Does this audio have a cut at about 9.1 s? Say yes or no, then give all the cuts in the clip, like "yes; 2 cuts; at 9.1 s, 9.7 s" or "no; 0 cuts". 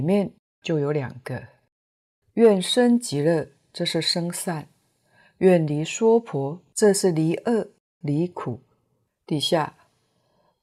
yes; 1 cut; at 9.1 s